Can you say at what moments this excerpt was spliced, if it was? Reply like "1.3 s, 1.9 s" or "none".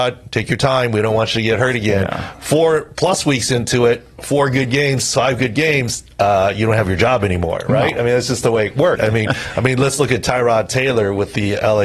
8.9 s

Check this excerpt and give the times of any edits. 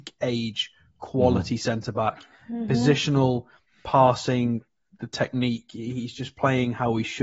none

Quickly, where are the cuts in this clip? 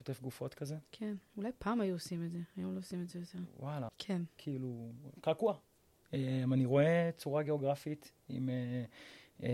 3.9 s

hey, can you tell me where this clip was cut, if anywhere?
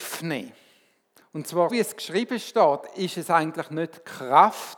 1.7 s

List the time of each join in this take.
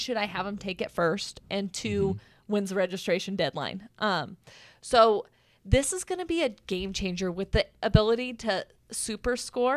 none

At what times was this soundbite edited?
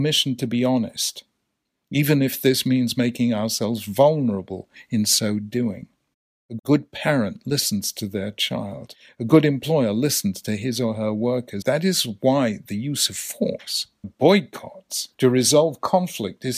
11.6 s, 14.0 s, 15.1 s

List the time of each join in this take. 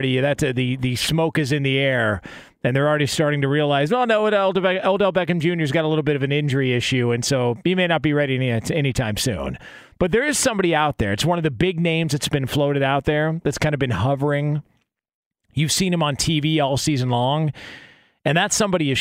none

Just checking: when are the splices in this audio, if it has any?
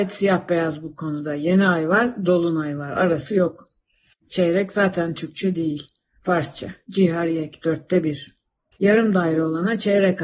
4.2 s, 8.7 s

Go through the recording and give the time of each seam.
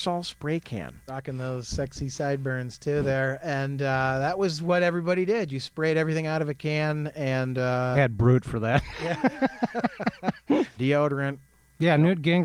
1.1 s, 7.9 s, 10.8 s

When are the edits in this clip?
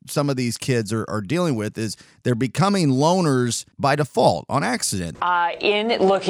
5.1 s

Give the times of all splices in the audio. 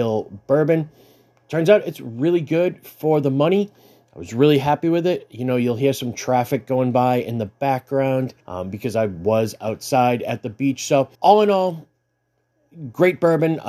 8.4 s, 11.1 s

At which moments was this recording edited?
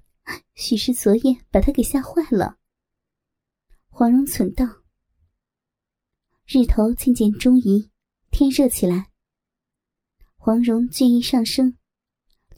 none

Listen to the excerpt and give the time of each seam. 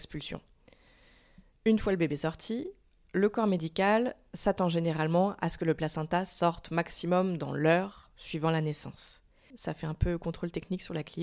9.5 s

